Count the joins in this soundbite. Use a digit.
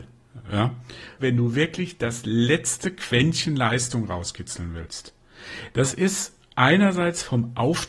1